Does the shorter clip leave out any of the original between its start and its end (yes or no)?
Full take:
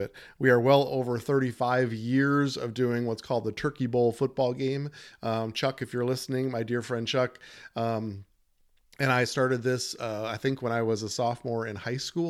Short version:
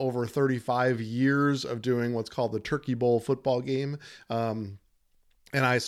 yes